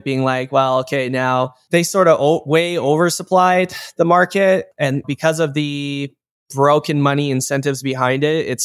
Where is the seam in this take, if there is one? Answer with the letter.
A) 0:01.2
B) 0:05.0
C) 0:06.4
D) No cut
B